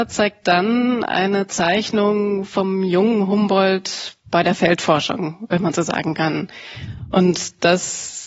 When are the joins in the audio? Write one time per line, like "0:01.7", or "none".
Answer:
none

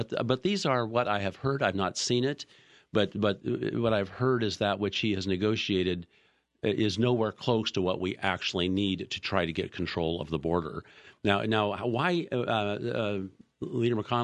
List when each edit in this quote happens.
none

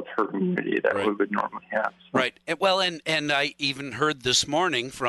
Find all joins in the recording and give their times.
none

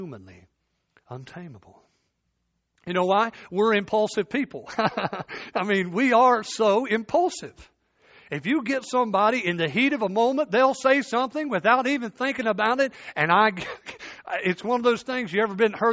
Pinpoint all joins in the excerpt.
none

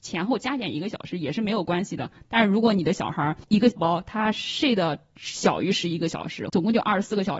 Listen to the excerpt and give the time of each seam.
0:03.8
0:06.5

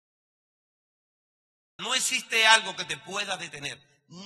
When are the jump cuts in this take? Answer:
0:01.8

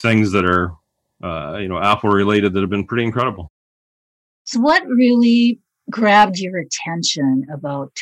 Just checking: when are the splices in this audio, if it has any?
0:04.5

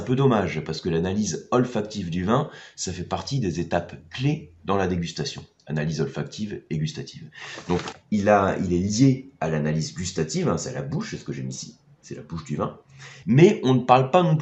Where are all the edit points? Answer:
0:07.9
0:13.2

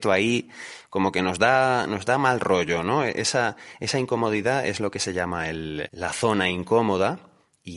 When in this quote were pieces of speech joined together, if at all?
0:05.9

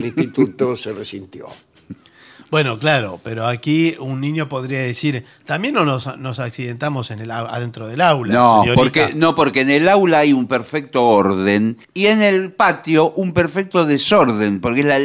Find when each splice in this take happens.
0:11.8

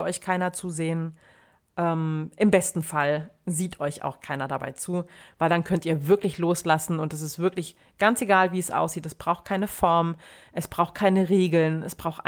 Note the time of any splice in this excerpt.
none

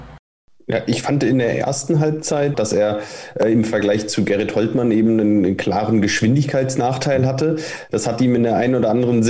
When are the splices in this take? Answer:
0:02.5

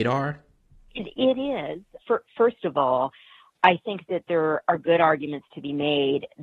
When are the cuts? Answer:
0:02.0

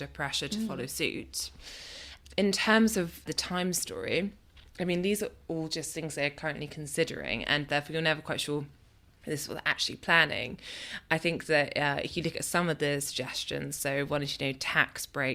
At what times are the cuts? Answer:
none

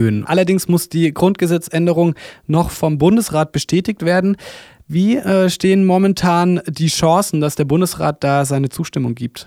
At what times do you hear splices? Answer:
none

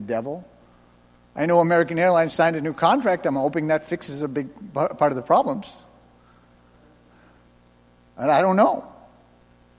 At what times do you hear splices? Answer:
0:02.3

